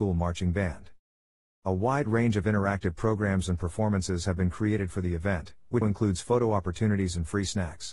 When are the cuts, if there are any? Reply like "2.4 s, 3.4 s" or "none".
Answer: 5.8 s